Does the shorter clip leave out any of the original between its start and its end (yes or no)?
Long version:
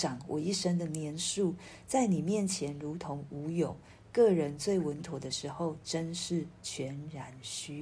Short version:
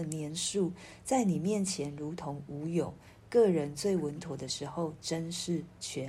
no